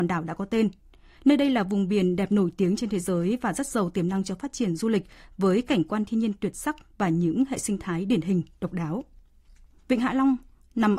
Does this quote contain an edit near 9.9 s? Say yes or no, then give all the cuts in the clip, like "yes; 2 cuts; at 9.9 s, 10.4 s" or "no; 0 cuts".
yes; 1 cut; at 9.9 s